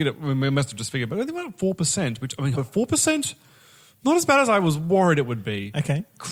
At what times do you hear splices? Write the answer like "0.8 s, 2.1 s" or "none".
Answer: 2.5 s